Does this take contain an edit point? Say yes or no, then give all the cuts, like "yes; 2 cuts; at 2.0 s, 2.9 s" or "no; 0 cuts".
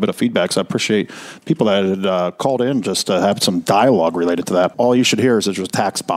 yes; 1 cut; at 4.7 s